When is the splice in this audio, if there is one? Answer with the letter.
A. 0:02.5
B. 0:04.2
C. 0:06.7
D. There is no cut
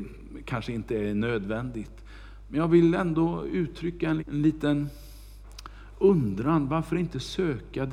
B